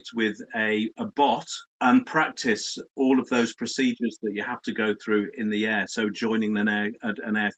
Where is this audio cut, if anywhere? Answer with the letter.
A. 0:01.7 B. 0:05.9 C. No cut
A